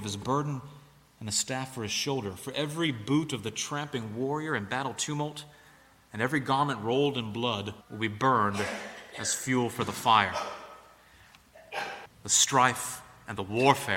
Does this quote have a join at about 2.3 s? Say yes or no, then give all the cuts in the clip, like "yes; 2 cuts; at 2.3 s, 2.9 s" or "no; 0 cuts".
no; 2 cuts; at 7.8 s, 12.1 s